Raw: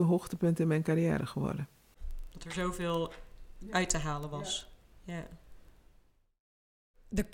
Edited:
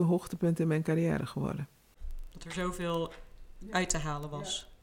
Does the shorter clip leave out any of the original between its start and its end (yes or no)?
no